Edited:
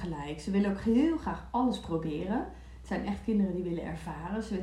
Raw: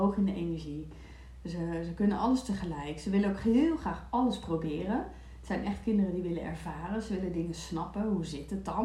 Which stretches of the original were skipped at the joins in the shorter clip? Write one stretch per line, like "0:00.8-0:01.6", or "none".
none